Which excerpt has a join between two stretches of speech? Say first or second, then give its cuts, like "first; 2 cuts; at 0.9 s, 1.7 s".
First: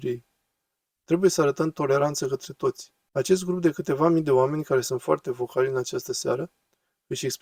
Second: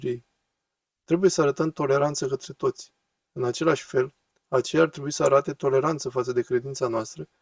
first; 1 cut; at 3.1 s